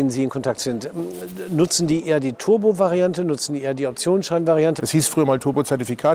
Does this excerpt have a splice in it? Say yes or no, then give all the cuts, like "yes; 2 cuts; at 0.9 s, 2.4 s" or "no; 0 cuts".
yes; 1 cut; at 4.8 s